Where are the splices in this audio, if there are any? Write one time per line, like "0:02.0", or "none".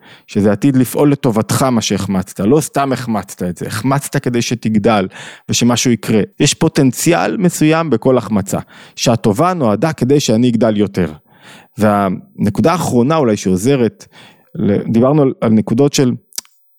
0:06.3